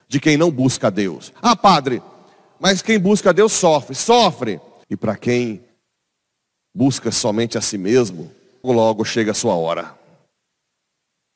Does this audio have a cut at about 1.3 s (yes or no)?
no